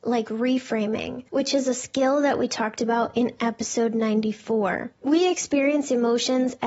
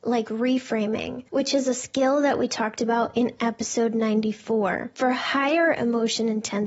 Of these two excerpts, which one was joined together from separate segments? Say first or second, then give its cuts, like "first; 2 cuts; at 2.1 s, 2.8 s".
first; 1 cut; at 4.9 s